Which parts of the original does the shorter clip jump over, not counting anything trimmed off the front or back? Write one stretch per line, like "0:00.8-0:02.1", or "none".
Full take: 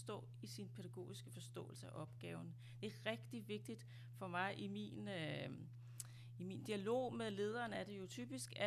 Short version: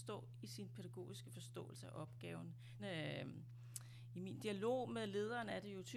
0:02.8-0:05.0